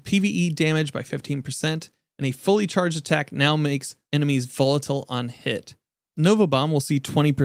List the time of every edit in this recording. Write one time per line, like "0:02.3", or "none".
0:04.0